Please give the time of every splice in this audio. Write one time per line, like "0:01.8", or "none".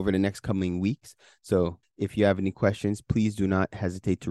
0:01.8